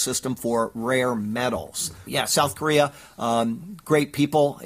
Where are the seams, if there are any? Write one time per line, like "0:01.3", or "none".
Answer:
0:02.1